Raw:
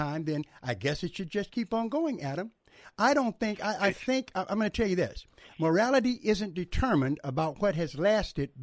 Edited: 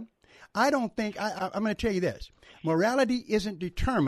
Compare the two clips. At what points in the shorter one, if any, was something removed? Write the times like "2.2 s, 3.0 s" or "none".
1.4 s